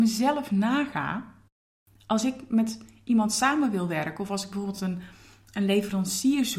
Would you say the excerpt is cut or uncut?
uncut